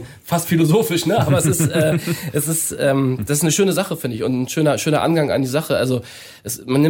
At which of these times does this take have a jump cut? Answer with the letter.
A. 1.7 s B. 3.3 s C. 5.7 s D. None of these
D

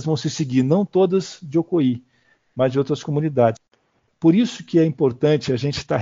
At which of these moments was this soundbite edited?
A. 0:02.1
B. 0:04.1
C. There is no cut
B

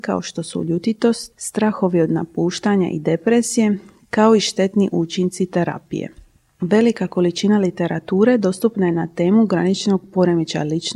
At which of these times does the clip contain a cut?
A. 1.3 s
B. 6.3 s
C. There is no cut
A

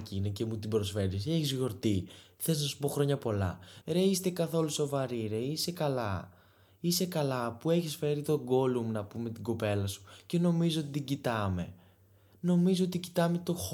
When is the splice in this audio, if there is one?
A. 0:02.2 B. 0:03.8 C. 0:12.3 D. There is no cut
B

